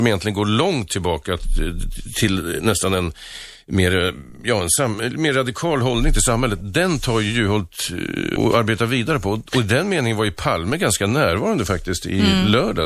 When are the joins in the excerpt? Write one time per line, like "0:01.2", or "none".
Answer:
0:08.4